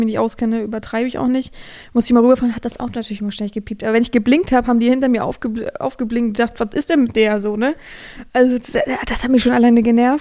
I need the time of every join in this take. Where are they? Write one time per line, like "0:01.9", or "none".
none